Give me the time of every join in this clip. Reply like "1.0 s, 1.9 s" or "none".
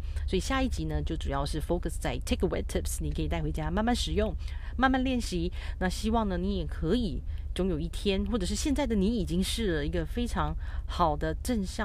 none